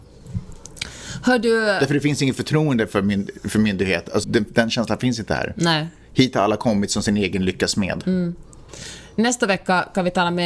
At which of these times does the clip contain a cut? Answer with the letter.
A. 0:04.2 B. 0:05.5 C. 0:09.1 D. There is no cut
A